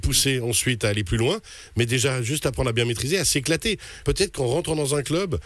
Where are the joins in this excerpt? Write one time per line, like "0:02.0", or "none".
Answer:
0:04.0